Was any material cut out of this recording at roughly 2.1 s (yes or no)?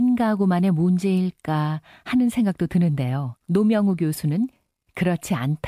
no